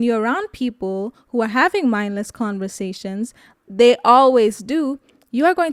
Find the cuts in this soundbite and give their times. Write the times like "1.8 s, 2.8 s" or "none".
3.5 s